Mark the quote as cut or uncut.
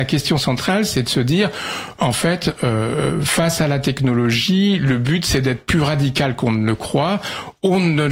uncut